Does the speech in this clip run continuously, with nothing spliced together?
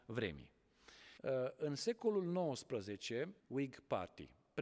no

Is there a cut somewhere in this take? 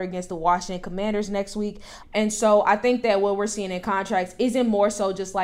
yes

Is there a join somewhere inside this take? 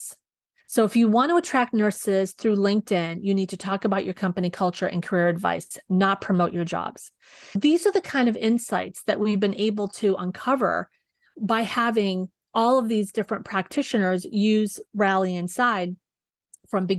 no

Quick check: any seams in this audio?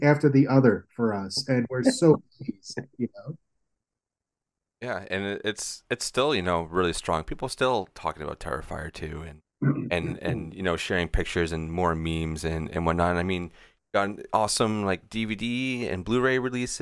no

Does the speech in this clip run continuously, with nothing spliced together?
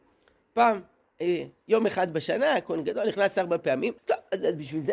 no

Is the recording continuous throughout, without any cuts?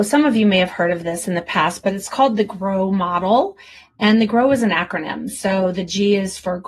yes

